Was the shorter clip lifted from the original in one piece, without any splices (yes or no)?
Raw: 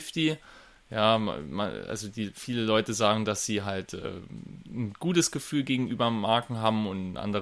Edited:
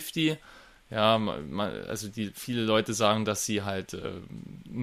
yes